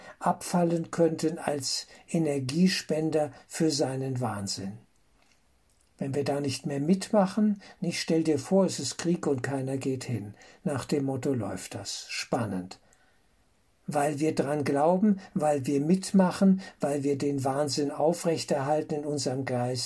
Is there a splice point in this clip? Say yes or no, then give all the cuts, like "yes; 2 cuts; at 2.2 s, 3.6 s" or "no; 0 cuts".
no; 0 cuts